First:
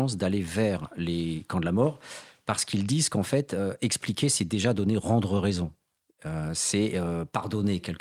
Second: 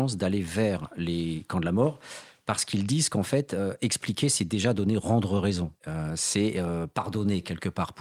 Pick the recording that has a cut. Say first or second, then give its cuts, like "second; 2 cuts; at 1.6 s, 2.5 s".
second; 1 cut; at 5.8 s